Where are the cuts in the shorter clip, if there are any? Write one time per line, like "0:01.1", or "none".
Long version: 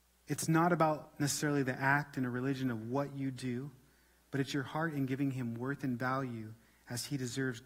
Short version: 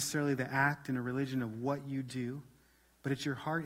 none